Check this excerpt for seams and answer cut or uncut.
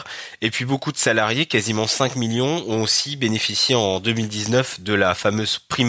uncut